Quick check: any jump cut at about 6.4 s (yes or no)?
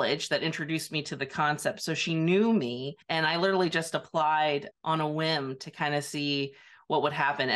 no